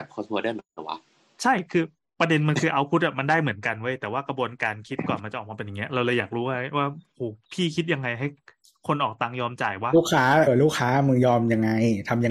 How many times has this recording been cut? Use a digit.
1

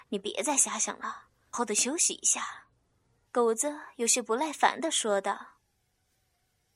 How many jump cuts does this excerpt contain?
2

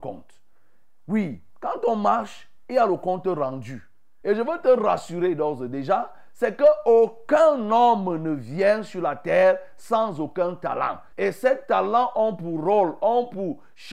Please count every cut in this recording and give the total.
2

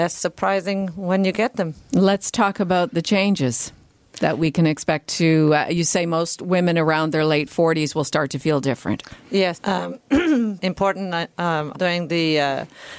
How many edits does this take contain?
3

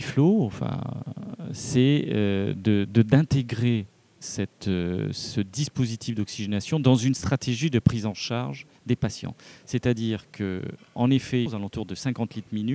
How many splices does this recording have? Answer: 2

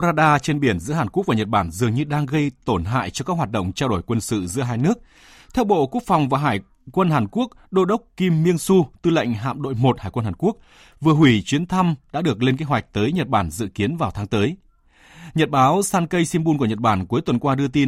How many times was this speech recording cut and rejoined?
0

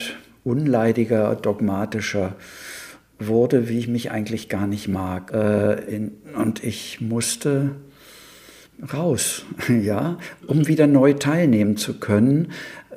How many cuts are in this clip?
2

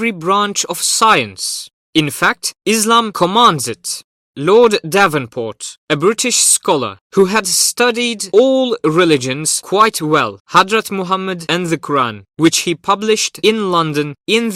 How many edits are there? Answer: 1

